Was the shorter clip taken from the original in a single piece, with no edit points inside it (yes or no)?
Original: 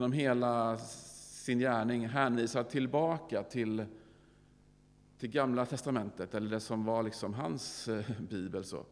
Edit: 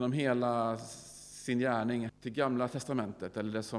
no